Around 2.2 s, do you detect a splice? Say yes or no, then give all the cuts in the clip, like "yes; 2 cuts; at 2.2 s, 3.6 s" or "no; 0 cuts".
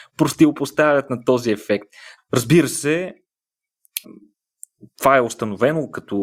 yes; 2 cuts; at 2.2 s, 4.0 s